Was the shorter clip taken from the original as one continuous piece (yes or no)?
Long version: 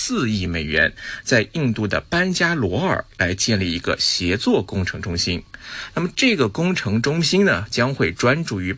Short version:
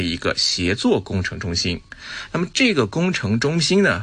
yes